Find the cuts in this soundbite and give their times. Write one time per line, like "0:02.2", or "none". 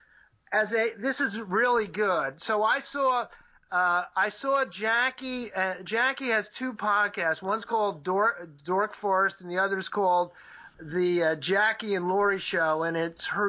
0:10.7